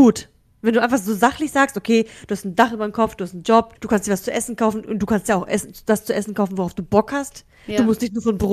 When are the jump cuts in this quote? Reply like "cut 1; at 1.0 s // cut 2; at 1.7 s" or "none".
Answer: cut 1; at 3.7 s